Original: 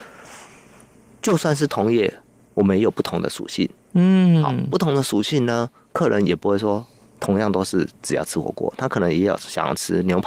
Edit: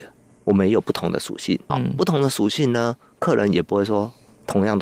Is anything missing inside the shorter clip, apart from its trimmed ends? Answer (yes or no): yes